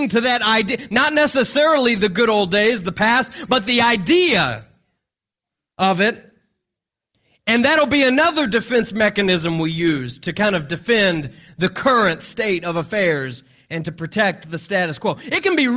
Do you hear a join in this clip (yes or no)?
no